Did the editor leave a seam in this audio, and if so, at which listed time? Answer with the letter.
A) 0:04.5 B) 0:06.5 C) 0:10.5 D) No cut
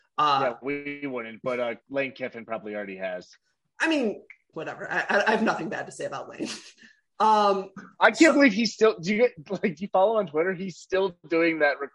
A